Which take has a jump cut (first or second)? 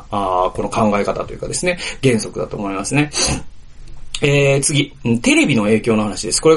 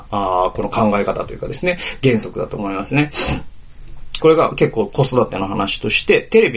second